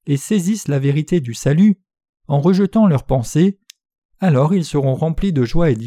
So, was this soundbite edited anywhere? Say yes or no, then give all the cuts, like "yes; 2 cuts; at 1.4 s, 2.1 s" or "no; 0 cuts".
no; 0 cuts